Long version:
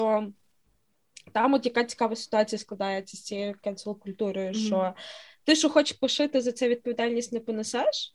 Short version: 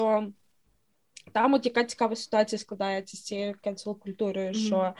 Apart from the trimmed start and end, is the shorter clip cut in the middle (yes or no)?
no